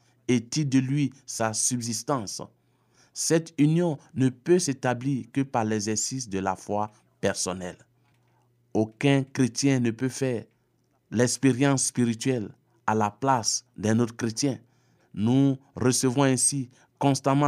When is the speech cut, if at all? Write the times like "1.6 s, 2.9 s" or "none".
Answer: 15.0 s